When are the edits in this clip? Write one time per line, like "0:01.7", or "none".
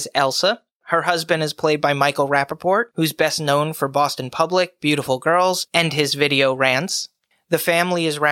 none